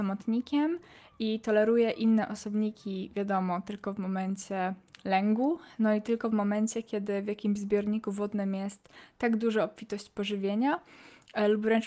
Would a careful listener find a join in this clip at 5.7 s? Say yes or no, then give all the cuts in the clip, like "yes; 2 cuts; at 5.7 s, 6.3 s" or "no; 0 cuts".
no; 0 cuts